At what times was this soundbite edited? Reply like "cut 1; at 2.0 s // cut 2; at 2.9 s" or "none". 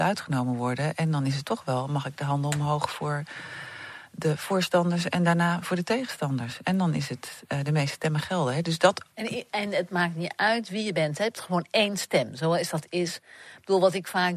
cut 1; at 9.1 s